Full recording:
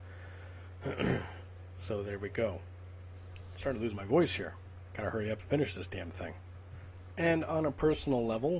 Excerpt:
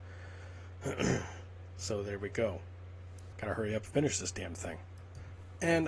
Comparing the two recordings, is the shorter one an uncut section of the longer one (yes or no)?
no